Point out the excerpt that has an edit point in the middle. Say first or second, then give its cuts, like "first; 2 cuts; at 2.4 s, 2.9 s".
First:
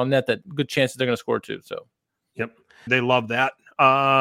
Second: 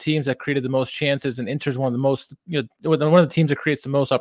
first; 1 cut; at 2.9 s